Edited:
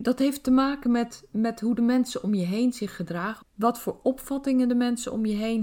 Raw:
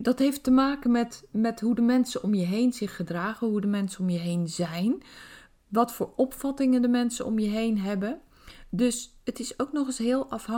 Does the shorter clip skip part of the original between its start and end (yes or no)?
yes